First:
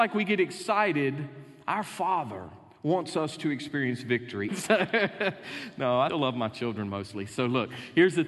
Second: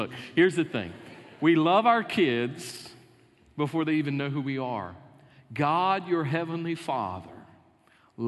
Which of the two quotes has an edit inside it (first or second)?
first